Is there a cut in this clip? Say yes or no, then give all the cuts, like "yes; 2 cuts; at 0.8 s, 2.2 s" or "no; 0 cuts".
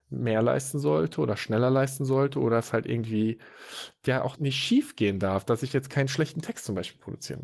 yes; 1 cut; at 4.4 s